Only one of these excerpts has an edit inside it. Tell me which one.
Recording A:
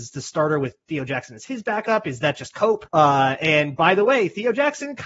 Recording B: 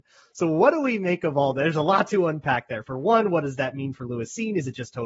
A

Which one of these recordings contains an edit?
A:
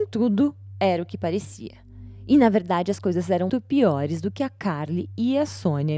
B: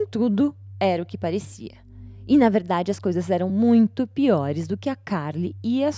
A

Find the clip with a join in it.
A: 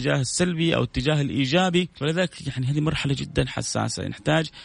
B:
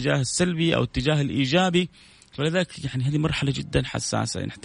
A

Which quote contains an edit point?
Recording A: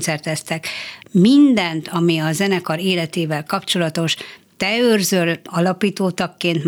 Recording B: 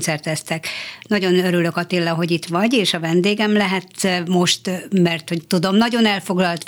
A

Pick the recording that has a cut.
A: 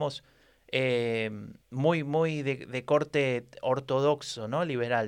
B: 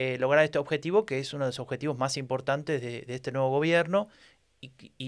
A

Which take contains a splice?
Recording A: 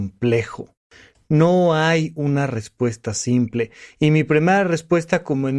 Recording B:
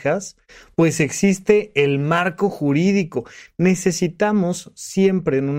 B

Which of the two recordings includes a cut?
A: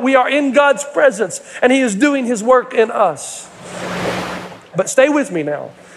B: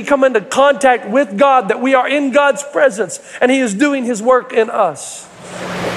A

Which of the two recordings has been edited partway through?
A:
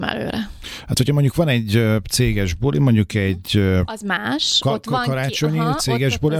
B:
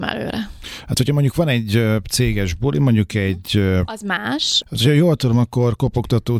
B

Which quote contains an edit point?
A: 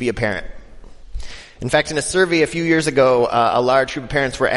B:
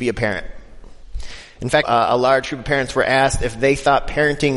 B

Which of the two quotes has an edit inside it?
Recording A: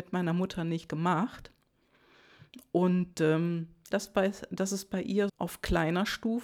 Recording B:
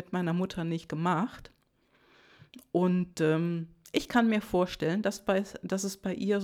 A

